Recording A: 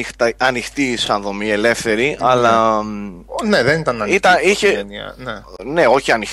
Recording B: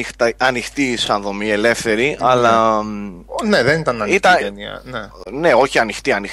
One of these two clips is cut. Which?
B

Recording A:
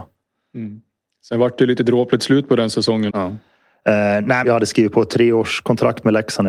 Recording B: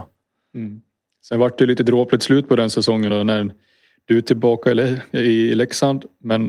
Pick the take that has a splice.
A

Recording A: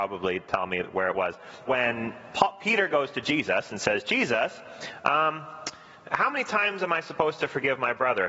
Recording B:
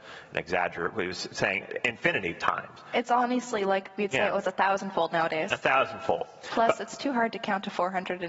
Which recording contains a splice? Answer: A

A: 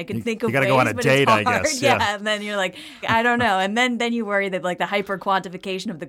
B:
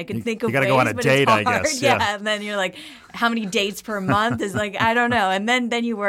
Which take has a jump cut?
A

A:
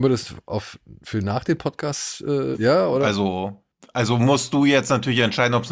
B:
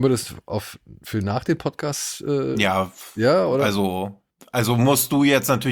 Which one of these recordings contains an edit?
A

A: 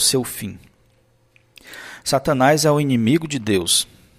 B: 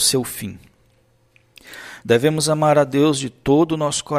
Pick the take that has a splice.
B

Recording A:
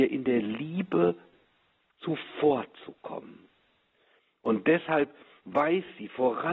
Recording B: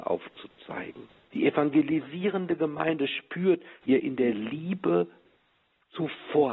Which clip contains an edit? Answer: B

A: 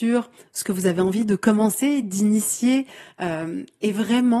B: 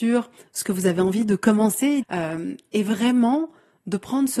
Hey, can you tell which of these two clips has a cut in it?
B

